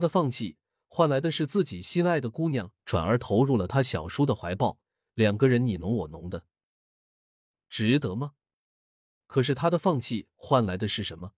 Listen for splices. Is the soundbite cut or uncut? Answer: cut